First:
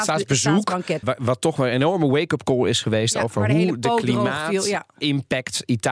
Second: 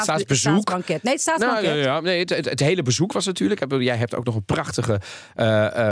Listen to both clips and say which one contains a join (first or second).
first